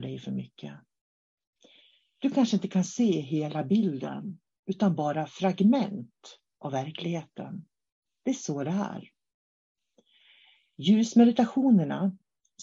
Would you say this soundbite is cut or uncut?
uncut